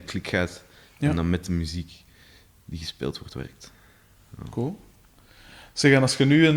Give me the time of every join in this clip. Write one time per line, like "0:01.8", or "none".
none